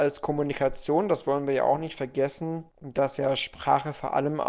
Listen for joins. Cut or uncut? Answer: cut